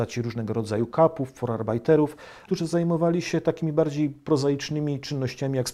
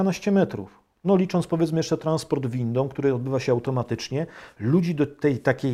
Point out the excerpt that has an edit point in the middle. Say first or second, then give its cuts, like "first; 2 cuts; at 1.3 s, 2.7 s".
first; 1 cut; at 2.5 s